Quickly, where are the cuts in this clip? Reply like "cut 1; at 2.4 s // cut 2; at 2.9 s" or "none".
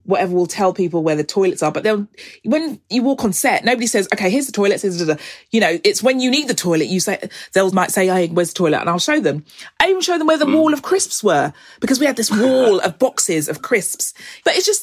none